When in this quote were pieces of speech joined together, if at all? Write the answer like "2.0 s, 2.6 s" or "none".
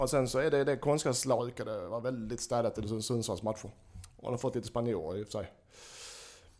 1.4 s